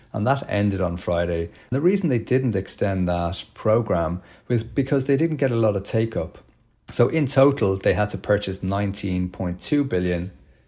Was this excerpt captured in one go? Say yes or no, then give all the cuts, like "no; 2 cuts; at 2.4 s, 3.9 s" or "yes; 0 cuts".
yes; 0 cuts